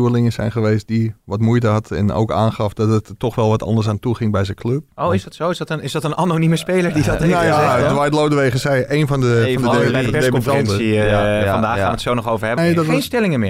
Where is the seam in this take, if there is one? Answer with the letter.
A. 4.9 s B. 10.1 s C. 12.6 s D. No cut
C